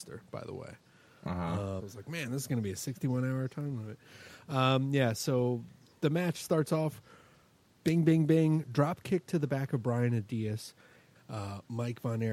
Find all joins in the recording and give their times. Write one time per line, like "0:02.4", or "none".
0:01.8
0:11.1